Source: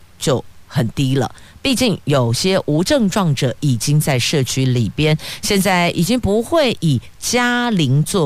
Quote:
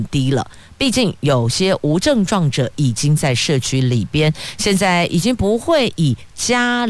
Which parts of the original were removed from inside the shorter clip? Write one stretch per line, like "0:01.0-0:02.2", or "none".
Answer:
none